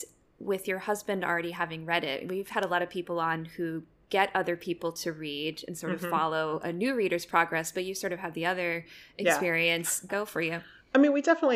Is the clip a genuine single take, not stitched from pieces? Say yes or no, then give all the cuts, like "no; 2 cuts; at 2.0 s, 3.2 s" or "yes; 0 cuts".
no; 1 cut; at 10.1 s